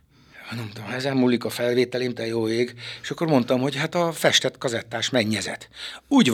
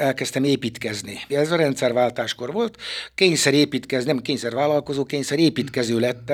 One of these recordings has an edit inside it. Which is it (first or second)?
second